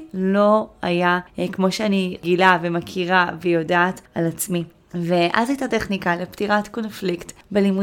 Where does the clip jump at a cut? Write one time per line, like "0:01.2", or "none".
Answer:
none